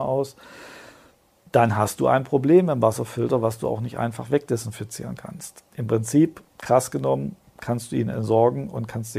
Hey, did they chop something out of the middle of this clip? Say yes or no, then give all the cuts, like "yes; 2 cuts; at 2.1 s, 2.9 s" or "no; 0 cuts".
no; 0 cuts